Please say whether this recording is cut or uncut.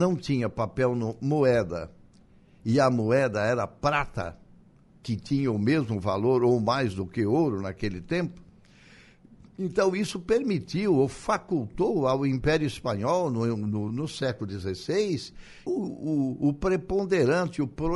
cut